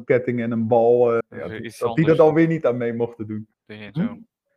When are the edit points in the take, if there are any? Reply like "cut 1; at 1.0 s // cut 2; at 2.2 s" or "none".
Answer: cut 1; at 1.2 s // cut 2; at 3.5 s